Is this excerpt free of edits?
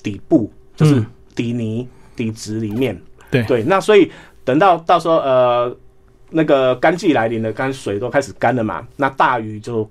yes; 0 cuts

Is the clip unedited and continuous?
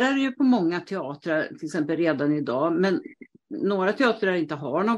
yes; 0 cuts

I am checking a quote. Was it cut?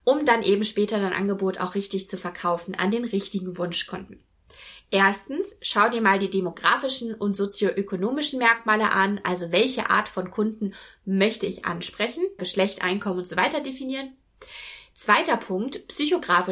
yes; 1 cut; at 12.4 s

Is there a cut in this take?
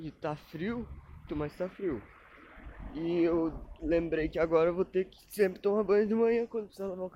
yes; 1 cut; at 1.3 s

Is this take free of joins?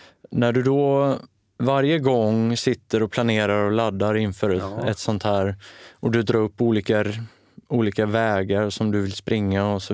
yes; 0 cuts

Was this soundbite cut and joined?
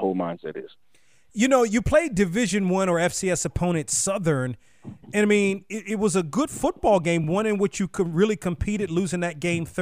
no; 0 cuts

